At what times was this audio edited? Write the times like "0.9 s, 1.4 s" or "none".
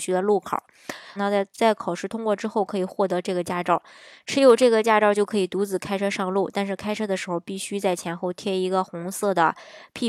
1.2 s